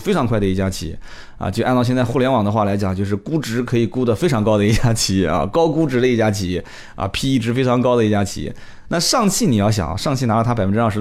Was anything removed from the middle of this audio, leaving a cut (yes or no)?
no